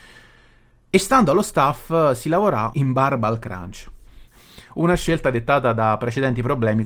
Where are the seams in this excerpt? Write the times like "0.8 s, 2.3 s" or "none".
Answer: 2.7 s, 4.3 s